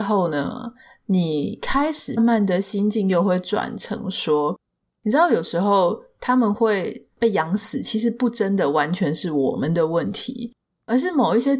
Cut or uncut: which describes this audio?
cut